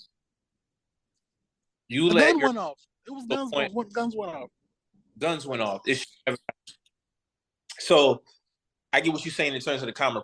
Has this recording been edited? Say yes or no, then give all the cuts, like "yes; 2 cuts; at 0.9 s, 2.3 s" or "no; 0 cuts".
no; 0 cuts